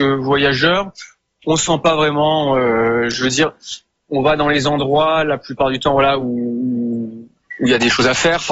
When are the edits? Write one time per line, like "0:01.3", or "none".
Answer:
none